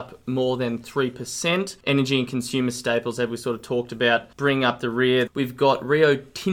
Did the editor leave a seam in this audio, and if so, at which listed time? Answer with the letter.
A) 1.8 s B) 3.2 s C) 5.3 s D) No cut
C